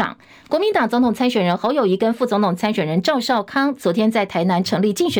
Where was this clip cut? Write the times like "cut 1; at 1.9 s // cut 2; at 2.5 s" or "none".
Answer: none